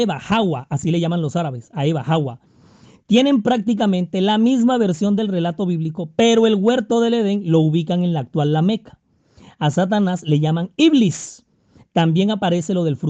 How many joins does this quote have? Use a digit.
0